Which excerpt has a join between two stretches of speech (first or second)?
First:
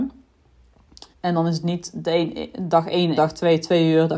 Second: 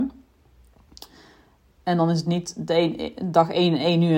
first